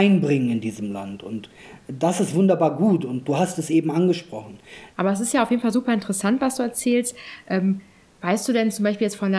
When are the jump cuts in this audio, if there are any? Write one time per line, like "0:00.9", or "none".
0:04.9